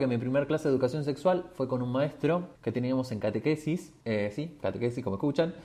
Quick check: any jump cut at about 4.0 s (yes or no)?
yes